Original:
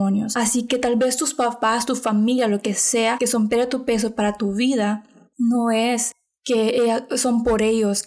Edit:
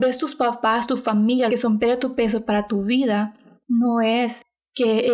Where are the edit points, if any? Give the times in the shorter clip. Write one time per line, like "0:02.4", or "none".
0:01.5